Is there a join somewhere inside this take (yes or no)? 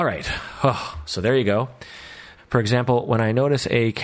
yes